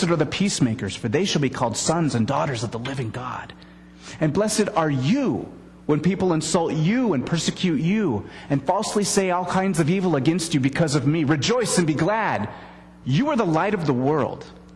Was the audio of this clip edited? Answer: yes; 2 cuts; at 4.2 s, 13.0 s

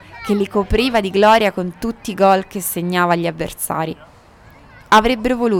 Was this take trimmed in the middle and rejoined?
no; 0 cuts

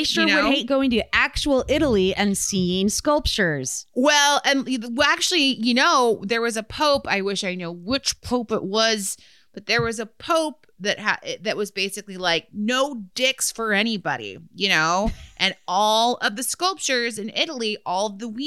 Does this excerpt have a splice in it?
no; 0 cuts

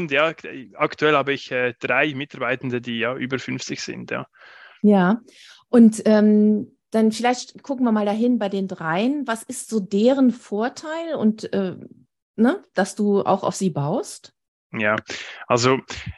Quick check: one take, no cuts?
yes; 0 cuts

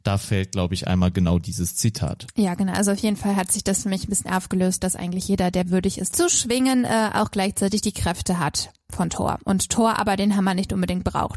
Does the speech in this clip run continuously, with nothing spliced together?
no; 1 cut; at 6.1 s

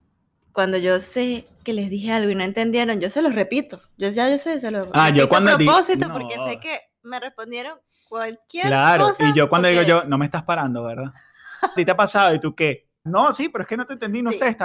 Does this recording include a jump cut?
yes; 2 cuts; at 11.8 s, 13.1 s

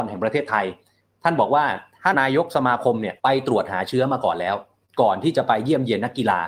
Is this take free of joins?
no; 2 cuts; at 2.1 s, 3.2 s

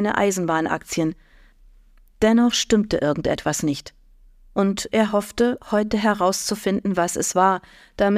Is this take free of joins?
yes; 0 cuts

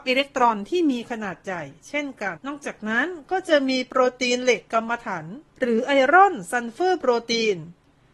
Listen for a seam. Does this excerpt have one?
yes; 2 cuts; at 2.4 s, 5.5 s

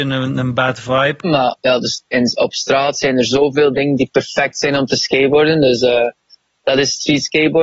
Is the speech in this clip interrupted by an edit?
yes; 1 cut; at 1.2 s

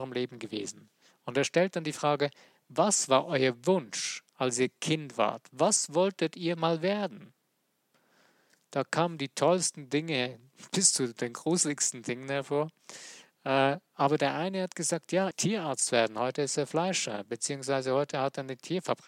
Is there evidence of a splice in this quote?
yes; 1 cut; at 15.3 s

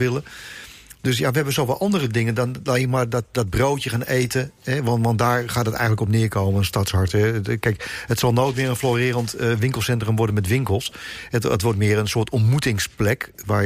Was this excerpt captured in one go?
yes; 0 cuts

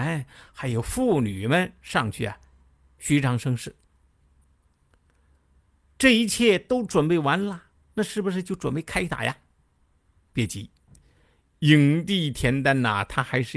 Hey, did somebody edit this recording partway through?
no; 0 cuts

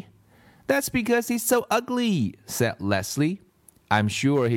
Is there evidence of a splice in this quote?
no; 0 cuts

